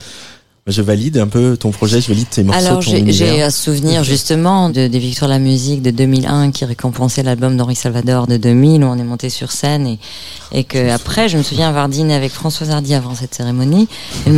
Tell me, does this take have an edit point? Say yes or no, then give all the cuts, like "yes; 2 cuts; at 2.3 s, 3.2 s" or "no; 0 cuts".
yes; 1 cut; at 4.7 s